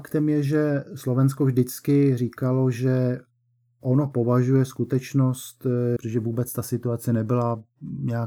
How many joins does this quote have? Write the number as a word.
one